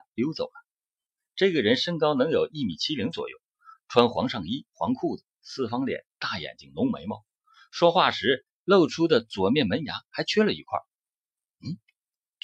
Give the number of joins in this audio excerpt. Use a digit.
0